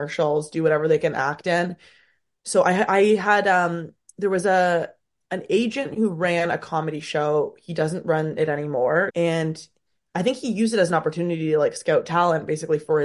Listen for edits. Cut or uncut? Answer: cut